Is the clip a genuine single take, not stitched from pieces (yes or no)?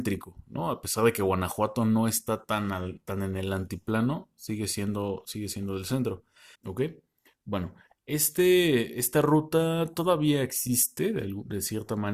no